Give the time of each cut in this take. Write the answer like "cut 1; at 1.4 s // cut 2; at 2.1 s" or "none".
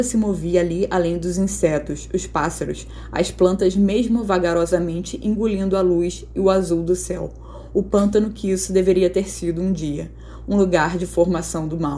none